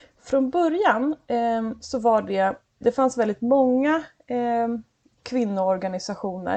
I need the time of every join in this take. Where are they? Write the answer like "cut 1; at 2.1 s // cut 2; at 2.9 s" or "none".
cut 1; at 2.8 s